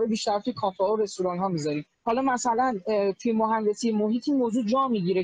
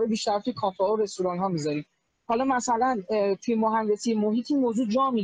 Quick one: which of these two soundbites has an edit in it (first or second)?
first